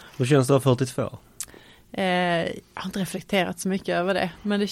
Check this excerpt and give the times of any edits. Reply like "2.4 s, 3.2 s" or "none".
none